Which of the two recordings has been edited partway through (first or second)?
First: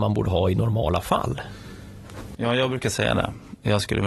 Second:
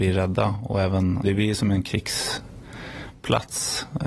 second